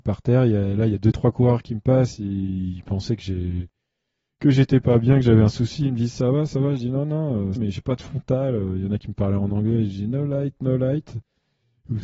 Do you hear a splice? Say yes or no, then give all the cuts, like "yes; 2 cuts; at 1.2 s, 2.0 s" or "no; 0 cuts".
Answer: yes; 1 cut; at 7.6 s